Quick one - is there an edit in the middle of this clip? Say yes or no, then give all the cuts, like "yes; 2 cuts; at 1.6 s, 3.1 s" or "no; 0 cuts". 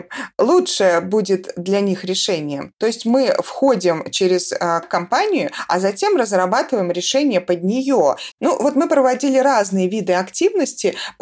yes; 2 cuts; at 4.8 s, 8.3 s